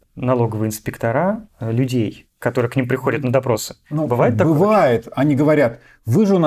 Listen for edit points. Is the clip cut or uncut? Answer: uncut